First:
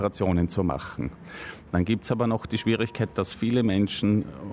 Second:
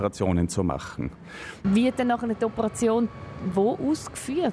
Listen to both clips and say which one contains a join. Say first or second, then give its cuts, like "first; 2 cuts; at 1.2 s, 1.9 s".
second; 1 cut; at 1.6 s